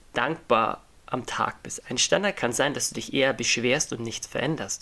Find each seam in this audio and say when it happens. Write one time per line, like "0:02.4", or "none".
0:01.8